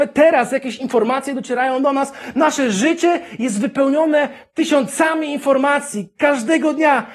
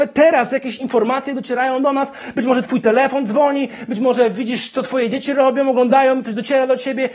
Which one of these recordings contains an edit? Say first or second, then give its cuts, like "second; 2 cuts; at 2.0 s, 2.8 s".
first; 1 cut; at 2.3 s